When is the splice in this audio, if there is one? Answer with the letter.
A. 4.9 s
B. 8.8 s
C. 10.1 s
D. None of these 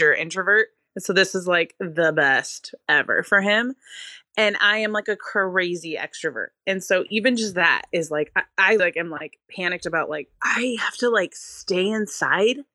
B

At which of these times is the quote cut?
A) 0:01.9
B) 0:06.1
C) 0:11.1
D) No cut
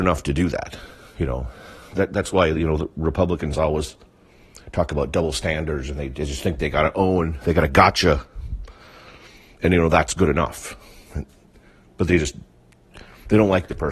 C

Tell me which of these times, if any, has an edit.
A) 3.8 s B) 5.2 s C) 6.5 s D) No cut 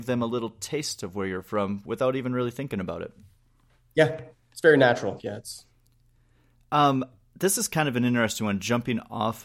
B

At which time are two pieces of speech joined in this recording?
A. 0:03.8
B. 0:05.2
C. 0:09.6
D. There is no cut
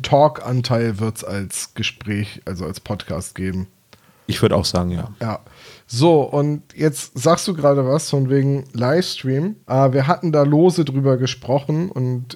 C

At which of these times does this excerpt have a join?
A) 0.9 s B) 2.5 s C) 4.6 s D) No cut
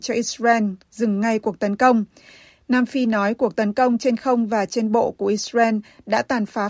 D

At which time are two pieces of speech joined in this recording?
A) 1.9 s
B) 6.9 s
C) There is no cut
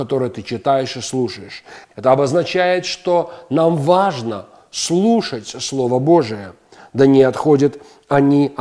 A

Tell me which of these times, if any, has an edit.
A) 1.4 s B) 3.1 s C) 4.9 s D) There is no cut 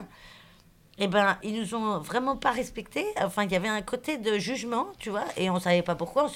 A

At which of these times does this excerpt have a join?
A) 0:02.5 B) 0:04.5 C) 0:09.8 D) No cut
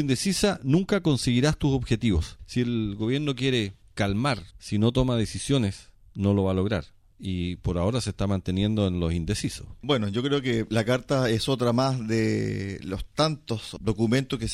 B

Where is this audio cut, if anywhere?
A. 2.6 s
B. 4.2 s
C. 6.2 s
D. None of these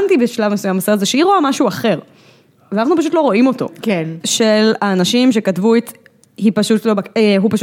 B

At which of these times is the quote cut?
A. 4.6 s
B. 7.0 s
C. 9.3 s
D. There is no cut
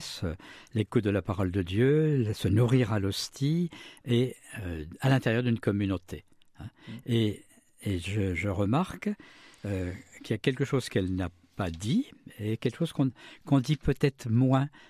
D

